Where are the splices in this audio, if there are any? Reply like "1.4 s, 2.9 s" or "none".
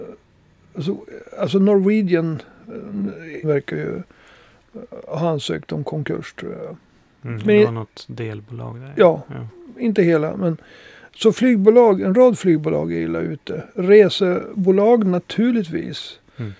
3.4 s